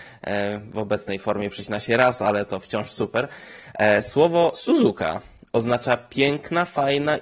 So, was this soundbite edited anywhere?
no; 0 cuts

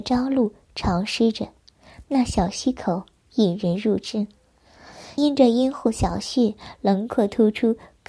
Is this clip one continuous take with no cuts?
no; 1 cut; at 5.2 s

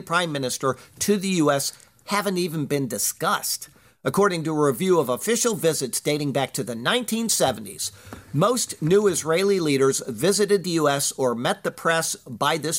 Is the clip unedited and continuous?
yes; 0 cuts

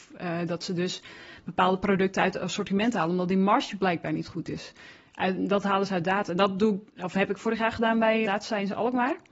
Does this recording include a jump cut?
yes; 2 cuts; at 6.3 s, 8.2 s

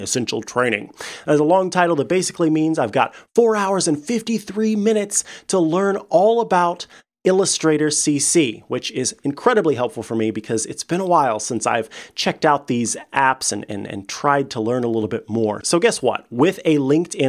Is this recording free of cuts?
no; 1 cut; at 15.6 s

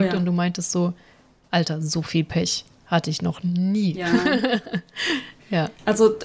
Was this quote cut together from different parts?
no; 0 cuts

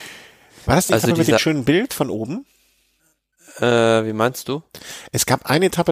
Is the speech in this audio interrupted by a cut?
no; 0 cuts

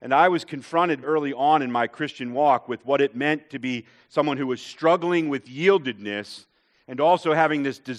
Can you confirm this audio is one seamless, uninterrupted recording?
no; 1 cut; at 1.0 s

